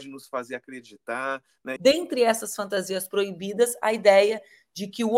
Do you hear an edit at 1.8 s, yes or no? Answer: yes